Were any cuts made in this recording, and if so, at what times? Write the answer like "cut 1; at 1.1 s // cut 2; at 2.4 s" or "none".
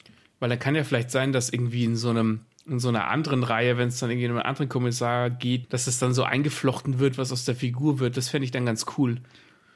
cut 1; at 5.6 s